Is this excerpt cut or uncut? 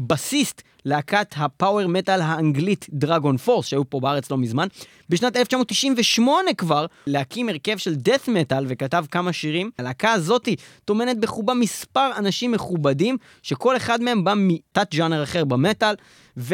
cut